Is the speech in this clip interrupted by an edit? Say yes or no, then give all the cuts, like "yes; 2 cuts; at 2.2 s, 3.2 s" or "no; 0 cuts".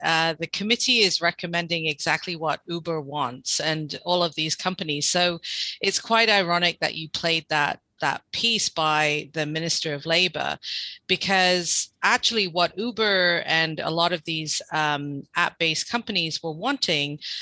no; 0 cuts